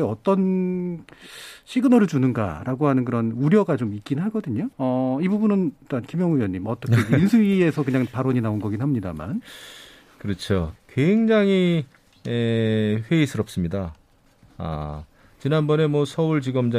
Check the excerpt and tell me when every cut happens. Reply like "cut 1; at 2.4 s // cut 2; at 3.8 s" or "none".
cut 1; at 4.7 s // cut 2; at 10.8 s